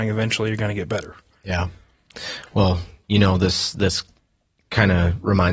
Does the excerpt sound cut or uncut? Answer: uncut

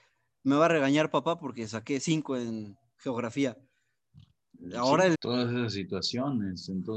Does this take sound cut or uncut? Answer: cut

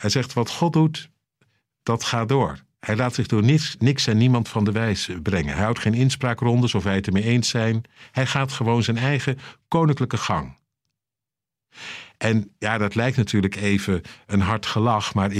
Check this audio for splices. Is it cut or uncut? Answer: uncut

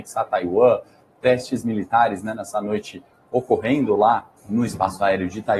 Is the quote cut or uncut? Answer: cut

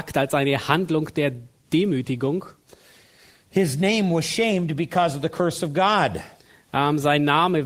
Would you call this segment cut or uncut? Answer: uncut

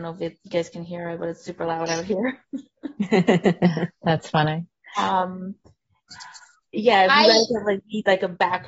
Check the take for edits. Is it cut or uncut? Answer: uncut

